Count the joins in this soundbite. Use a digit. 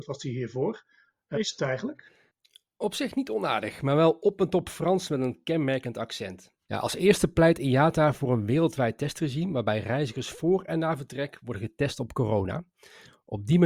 2